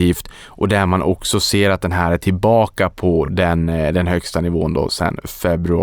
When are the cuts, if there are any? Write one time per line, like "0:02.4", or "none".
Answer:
none